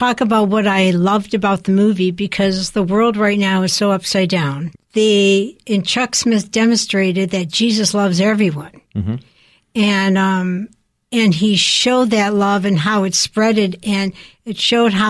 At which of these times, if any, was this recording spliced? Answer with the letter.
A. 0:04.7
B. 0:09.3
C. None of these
A